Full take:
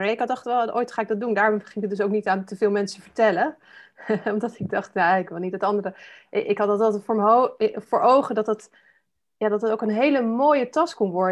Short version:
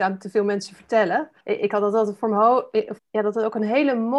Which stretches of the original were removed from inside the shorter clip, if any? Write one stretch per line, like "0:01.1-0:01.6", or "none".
0:03.7-0:06.3
0:07.8-0:09.3